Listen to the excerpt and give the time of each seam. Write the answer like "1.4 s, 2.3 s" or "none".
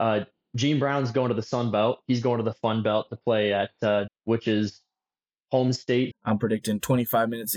4.1 s, 6.1 s